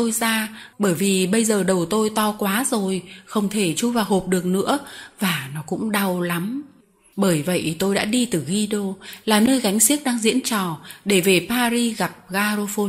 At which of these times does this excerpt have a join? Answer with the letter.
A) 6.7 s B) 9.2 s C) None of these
C